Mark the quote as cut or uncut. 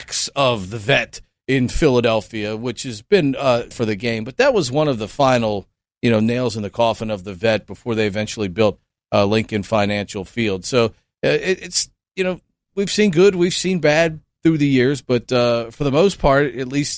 cut